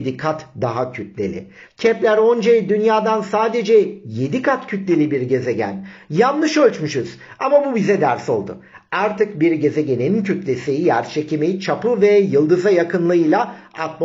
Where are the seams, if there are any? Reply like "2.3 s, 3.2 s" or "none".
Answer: 1.6 s